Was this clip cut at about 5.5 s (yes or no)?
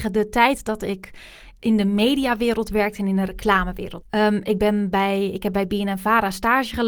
no